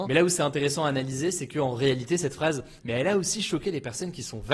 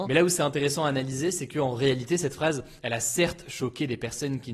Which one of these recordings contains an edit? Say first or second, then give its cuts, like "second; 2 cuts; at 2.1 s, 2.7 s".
first; 1 cut; at 2.8 s